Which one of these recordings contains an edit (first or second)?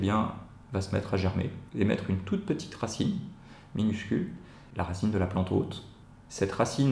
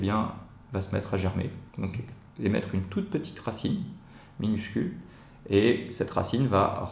first